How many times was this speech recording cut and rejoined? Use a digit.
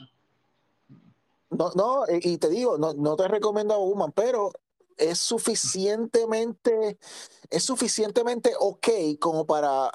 1